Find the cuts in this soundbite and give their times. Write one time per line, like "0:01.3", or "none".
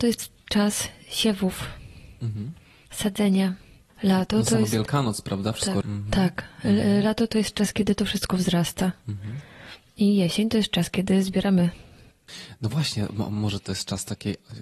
0:05.8